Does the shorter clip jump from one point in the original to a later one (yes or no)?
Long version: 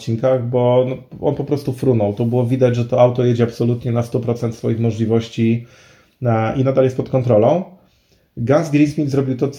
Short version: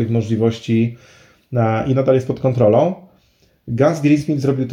no